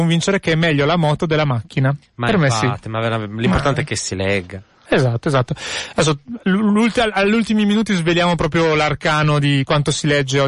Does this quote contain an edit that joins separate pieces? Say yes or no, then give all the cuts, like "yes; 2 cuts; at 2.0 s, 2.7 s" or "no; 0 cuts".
no; 0 cuts